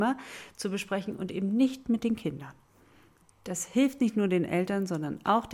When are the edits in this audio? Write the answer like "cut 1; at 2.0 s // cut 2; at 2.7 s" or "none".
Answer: cut 1; at 3.3 s